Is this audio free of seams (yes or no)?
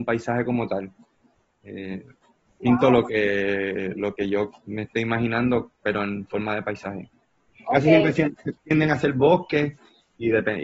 yes